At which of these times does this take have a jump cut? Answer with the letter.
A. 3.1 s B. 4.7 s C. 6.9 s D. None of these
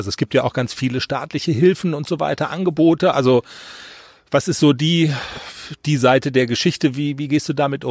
A